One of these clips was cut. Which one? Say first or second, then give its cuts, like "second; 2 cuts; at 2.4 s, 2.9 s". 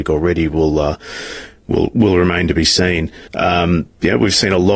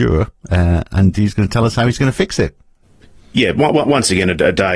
first; 1 cut; at 3.3 s